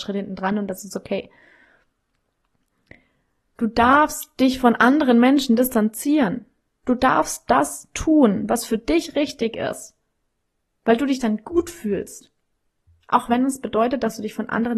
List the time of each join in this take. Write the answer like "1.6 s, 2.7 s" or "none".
none